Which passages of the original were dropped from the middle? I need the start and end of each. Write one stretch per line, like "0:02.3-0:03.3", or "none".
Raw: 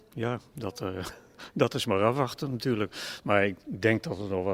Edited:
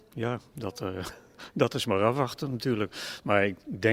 none